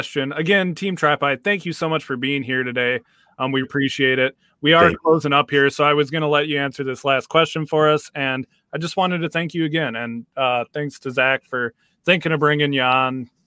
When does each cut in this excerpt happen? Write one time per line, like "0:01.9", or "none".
0:03.6